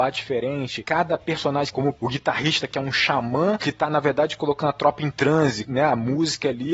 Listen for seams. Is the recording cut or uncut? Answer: cut